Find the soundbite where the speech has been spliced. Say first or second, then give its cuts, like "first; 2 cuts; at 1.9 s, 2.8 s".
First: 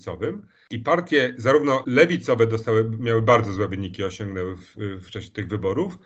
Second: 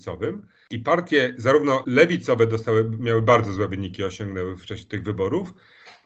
second; 1 cut; at 4.6 s